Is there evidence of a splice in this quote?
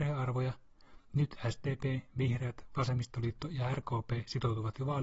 no; 0 cuts

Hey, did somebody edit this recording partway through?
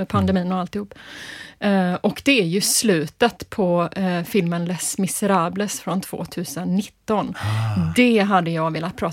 no; 0 cuts

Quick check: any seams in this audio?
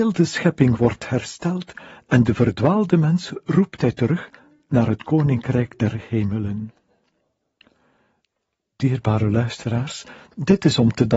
no; 0 cuts

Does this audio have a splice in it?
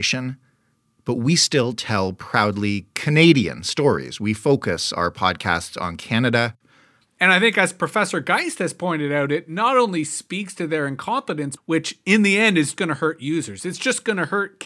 yes; 3 cuts; at 7.0 s, 11.6 s, 12.8 s

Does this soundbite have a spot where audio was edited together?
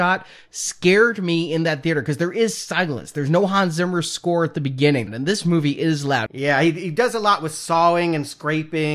yes; 2 cuts; at 5.1 s, 6.3 s

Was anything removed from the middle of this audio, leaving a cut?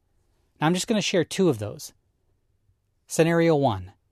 no; 0 cuts

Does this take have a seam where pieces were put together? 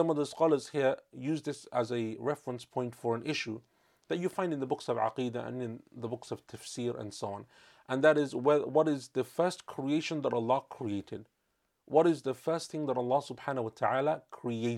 no; 0 cuts

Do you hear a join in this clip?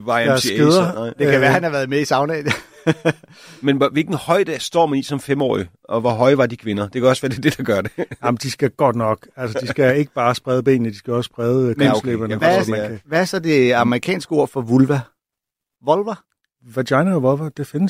yes; 1 cut; at 15.8 s

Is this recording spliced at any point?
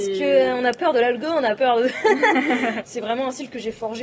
yes; 1 cut; at 2.8 s

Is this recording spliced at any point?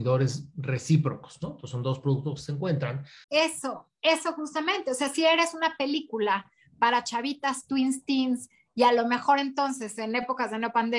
yes; 1 cut; at 3.2 s

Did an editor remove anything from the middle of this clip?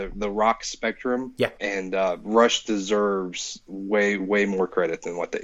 yes; 2 cuts; at 1.5 s, 4.2 s

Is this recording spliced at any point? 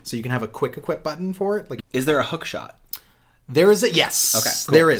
yes; 1 cut; at 1.8 s

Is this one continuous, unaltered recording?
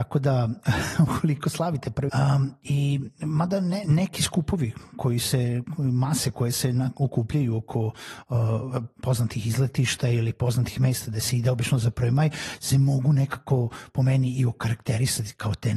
no; 1 cut; at 2.1 s

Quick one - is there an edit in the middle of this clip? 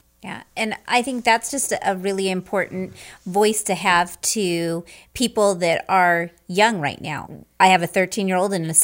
yes; 1 cut; at 7.2 s

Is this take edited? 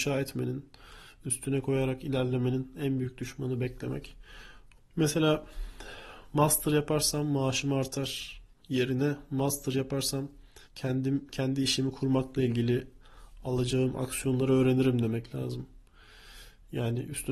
yes; 2 cuts; at 4.8 s, 10.6 s

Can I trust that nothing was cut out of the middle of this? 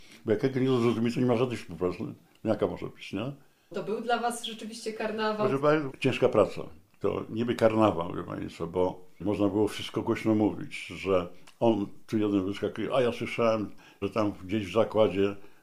no; 1 cut; at 3.7 s

